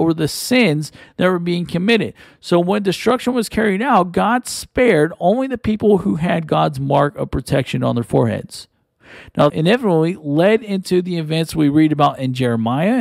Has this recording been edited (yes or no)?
yes